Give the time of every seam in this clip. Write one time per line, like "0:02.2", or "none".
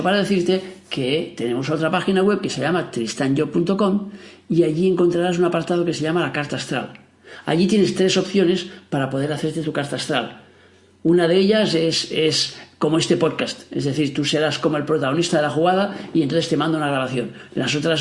none